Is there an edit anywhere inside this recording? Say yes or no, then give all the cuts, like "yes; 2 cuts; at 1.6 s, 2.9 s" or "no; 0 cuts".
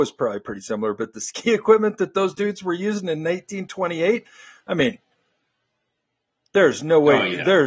no; 0 cuts